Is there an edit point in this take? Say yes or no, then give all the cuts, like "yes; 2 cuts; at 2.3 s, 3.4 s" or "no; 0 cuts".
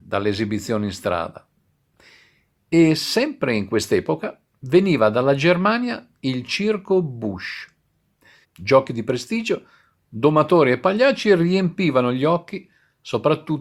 yes; 1 cut; at 8.4 s